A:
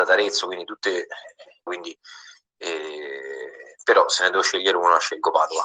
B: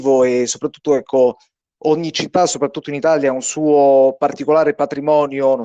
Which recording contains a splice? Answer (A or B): A